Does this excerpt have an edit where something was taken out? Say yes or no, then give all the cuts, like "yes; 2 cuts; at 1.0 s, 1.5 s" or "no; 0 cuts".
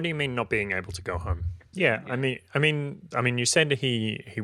yes; 2 cuts; at 1.7 s, 3.1 s